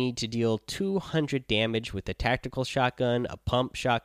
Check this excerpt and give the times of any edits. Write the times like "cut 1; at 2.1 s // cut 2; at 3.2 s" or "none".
none